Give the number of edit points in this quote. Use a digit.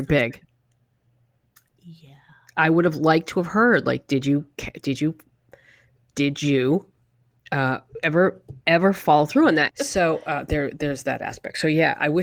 1